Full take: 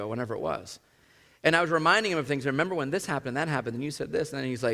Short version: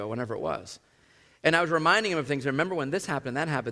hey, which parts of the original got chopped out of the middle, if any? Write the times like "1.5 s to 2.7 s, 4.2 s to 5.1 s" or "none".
none